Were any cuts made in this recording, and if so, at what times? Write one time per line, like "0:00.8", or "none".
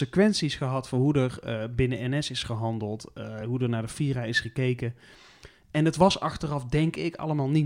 none